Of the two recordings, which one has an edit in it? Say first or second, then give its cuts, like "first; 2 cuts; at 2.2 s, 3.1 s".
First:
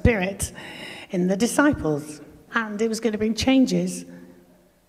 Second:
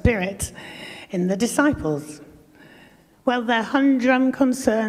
first; 1 cut; at 2.5 s